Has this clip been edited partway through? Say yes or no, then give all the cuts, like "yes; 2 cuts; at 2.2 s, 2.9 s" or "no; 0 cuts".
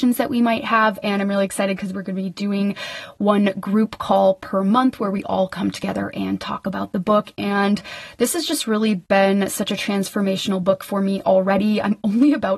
no; 0 cuts